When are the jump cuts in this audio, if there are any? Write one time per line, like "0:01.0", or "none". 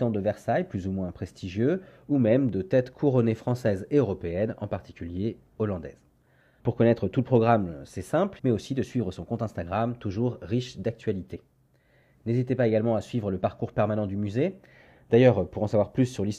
0:06.6
0:08.4